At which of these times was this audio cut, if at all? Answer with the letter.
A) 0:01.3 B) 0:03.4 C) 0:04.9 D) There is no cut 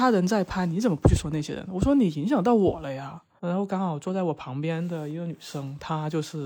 B